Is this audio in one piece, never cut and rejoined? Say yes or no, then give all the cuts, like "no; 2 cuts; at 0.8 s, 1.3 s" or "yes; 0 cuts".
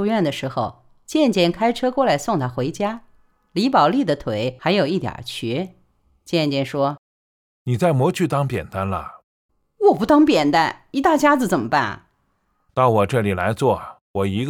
yes; 0 cuts